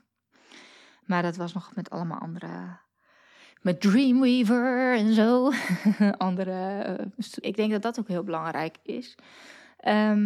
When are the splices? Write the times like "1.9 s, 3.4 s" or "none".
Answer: 7.4 s

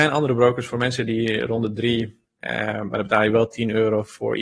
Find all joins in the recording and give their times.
2.4 s

